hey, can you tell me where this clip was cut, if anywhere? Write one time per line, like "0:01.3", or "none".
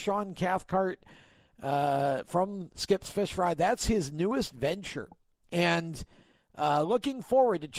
none